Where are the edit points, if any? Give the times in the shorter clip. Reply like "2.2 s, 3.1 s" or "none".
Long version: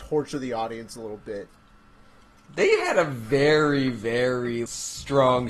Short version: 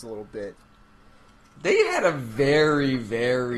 none

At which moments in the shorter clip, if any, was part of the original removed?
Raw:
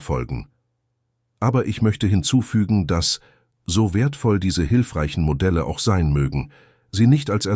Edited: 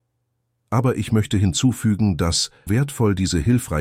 2.7 s

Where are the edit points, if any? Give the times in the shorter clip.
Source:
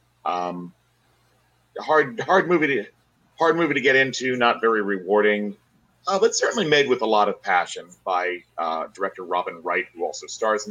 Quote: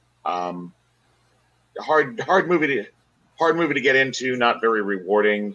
none

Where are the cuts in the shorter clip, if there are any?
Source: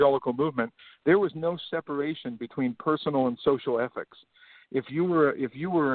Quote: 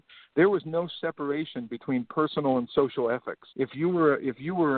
3.5 s

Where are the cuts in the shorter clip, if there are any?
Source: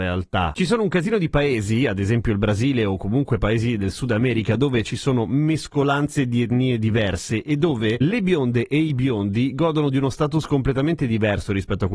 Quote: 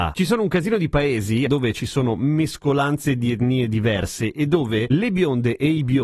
1.5 s

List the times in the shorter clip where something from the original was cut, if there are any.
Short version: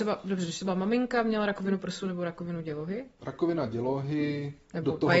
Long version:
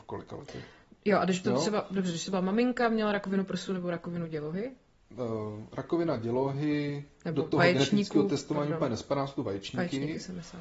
3.2 s

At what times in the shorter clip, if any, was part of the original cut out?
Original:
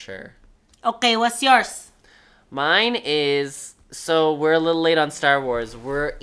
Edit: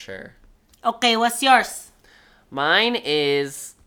none

